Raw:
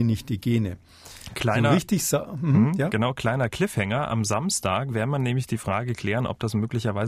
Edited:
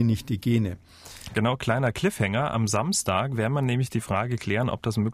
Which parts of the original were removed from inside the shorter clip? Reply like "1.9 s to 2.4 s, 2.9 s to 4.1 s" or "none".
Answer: 1.3 s to 2.9 s